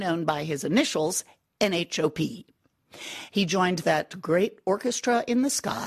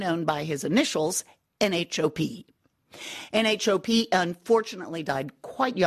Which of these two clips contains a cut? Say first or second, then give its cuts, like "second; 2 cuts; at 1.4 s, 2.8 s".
first; 1 cut; at 3.3 s